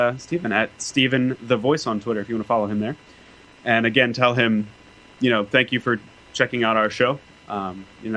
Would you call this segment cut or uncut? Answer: uncut